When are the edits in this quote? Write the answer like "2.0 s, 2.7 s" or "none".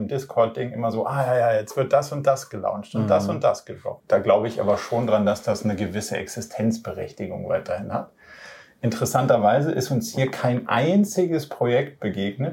4.0 s